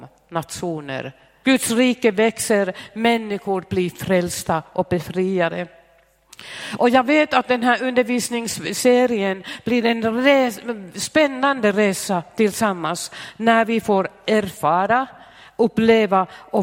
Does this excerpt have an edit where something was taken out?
yes; 1 cut; at 1.4 s

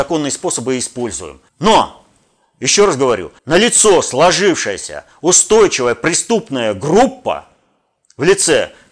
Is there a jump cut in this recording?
yes; 2 cuts; at 1.5 s, 3.4 s

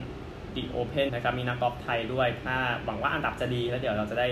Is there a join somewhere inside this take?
yes; 1 cut; at 1.1 s

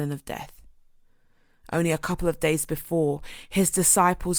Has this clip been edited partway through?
no; 0 cuts

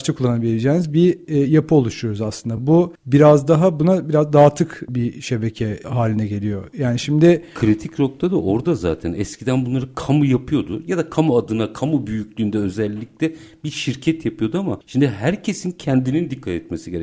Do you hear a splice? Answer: no; 0 cuts

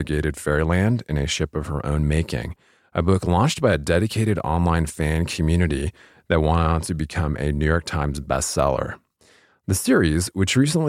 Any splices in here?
no; 0 cuts

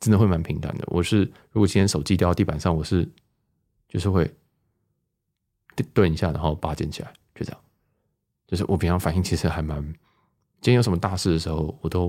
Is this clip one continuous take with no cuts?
yes; 0 cuts

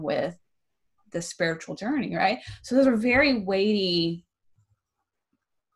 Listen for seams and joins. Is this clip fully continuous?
yes; 0 cuts

